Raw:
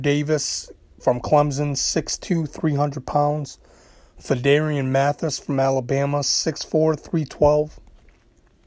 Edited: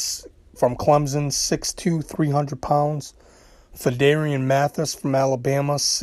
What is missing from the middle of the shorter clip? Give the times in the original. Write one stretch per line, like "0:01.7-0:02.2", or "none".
none

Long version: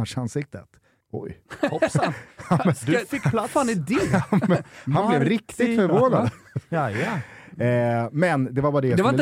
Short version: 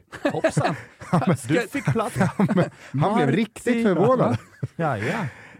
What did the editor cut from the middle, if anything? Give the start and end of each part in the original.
0:03.5-0:04.1

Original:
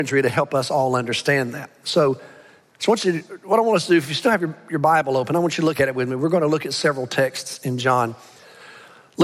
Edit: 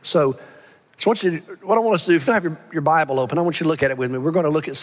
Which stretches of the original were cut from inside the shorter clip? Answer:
0:04.1-0:04.2

